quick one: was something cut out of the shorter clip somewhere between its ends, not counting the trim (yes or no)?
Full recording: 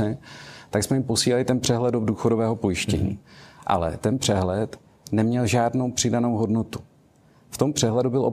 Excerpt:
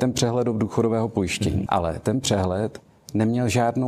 yes